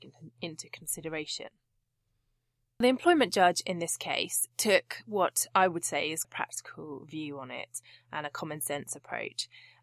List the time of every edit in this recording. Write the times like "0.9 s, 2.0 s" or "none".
6.2 s